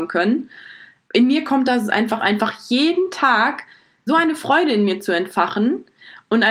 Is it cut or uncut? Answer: cut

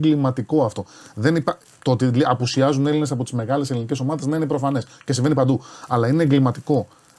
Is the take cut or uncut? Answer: uncut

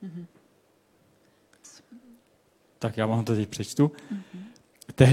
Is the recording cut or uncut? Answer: uncut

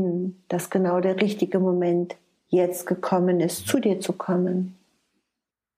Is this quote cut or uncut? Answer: uncut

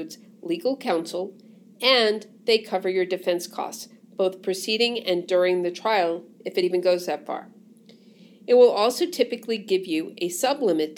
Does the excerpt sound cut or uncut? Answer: uncut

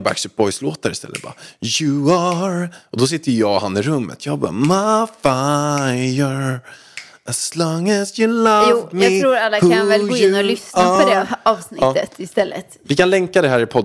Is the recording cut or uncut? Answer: uncut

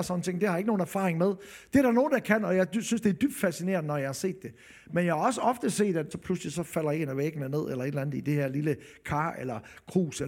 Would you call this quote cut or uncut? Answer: cut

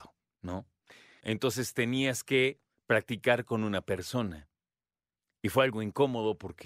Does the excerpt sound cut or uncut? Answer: cut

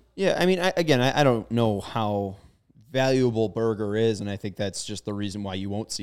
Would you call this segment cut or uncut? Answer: uncut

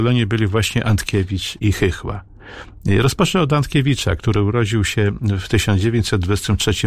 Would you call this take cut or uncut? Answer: cut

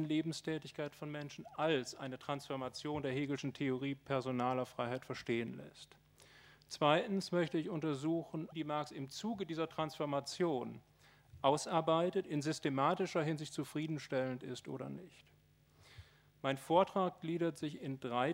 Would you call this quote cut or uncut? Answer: cut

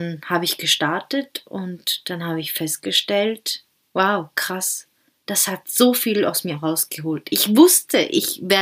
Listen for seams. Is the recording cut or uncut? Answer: uncut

